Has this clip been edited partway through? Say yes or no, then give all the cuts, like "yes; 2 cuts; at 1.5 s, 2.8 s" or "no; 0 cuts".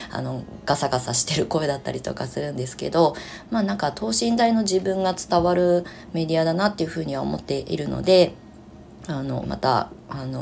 yes; 1 cut; at 9.4 s